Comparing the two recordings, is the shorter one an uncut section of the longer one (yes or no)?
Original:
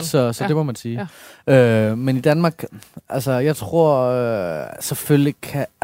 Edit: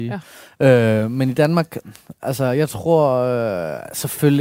yes